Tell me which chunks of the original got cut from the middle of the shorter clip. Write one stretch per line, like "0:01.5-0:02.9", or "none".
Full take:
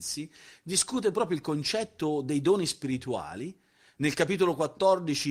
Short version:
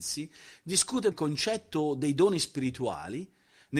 0:01.1-0:01.4